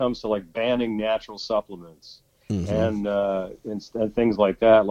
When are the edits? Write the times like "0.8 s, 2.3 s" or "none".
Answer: none